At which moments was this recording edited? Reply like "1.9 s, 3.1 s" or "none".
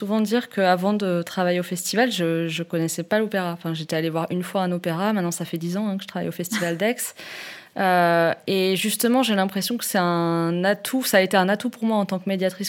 none